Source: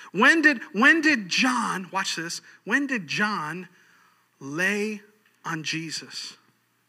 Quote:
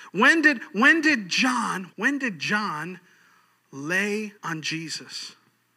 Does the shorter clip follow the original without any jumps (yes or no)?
no